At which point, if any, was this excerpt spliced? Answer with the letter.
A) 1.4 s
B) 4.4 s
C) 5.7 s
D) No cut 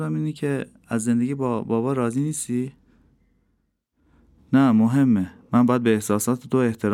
B